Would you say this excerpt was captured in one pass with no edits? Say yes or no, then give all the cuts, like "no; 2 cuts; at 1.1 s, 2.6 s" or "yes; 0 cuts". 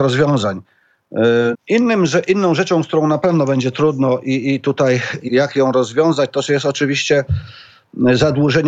no; 2 cuts; at 1.5 s, 5.3 s